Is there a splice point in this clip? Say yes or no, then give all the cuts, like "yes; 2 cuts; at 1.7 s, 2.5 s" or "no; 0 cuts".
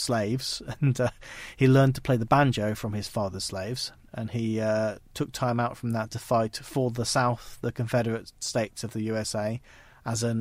yes; 1 cut; at 4.1 s